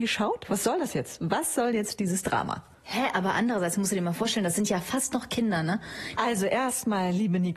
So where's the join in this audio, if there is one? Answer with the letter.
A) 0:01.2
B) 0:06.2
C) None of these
B